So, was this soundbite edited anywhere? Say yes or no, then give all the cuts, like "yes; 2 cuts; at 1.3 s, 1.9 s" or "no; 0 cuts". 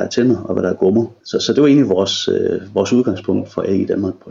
yes; 1 cut; at 1.2 s